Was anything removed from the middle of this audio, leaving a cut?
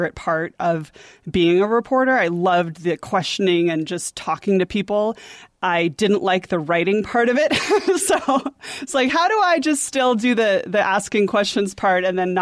no; 0 cuts

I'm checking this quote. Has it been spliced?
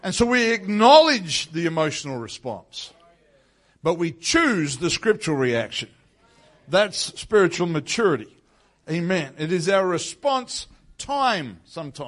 no; 0 cuts

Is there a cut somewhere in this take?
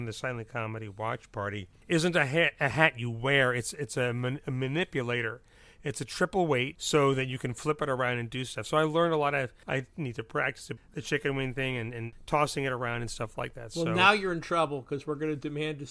yes; 1 cut; at 10.8 s

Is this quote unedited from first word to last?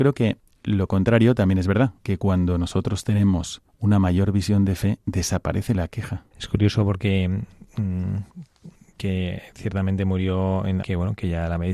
no; 2 cuts; at 6.3 s, 10.8 s

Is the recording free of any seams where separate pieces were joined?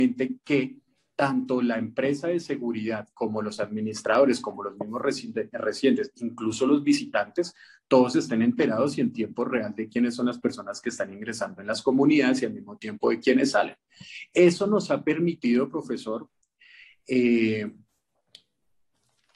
yes; 0 cuts

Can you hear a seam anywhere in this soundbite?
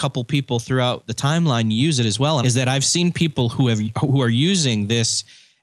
yes; 1 cut; at 2.4 s

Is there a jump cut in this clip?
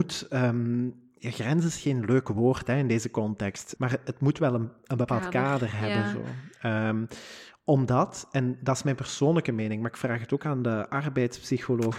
yes; 1 cut; at 3.8 s

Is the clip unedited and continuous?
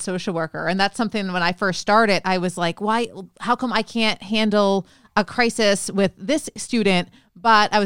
yes; 0 cuts

